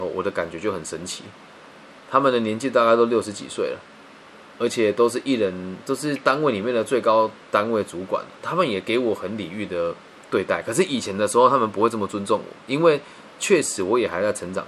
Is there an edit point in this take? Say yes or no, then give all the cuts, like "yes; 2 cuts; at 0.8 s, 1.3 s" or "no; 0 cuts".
no; 0 cuts